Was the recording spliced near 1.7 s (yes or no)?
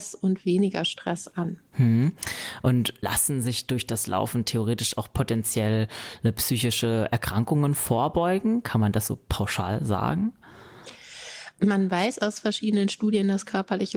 yes